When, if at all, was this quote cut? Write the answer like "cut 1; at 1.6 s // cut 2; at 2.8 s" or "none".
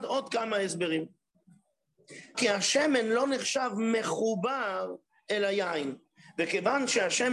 cut 1; at 2.3 s